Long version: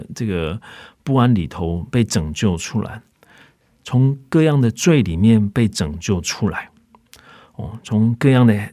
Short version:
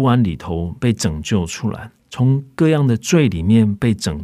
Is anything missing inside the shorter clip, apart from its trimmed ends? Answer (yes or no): yes